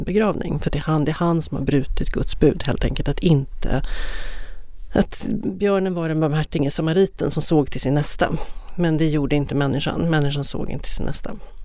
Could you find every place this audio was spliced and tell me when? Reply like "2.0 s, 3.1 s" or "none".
none